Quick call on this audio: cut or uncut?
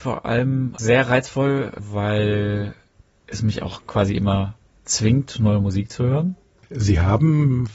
cut